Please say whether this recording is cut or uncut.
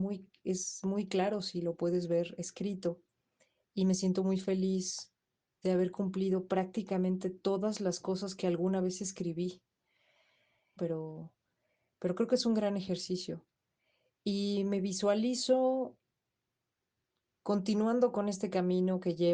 cut